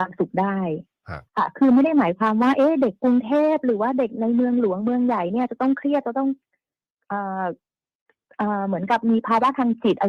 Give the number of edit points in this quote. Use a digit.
1